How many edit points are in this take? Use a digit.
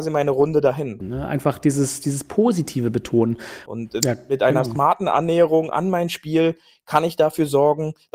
2